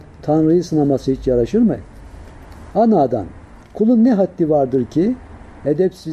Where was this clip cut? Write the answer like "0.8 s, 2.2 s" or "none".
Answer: 3.6 s

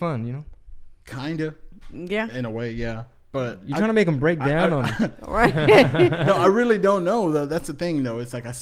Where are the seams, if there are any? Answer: 1.0 s

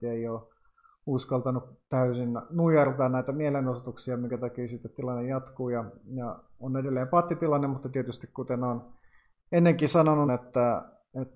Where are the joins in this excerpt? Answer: 10.3 s

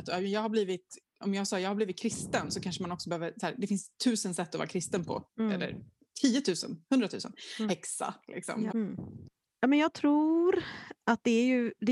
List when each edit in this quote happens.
7.7 s, 8.7 s

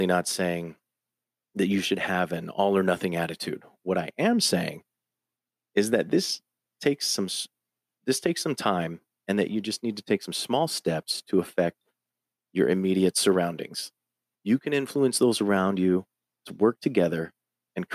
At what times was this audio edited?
14.4 s, 16.3 s

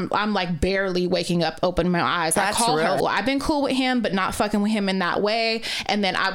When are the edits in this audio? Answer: 3.0 s

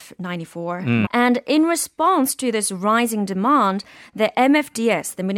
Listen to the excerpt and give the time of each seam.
1.1 s

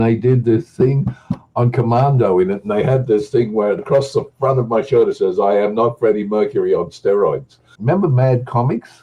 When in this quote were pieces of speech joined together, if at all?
3.8 s, 7.7 s

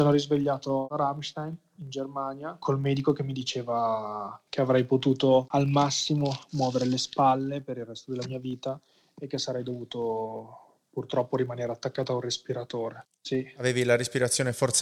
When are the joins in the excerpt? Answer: 13.2 s

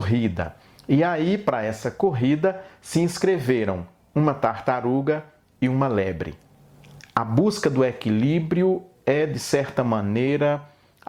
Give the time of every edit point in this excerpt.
7.0 s

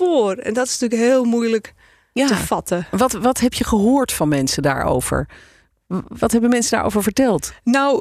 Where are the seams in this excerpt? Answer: none

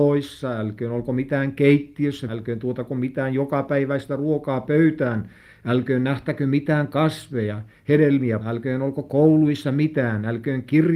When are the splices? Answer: 2.3 s, 8.4 s

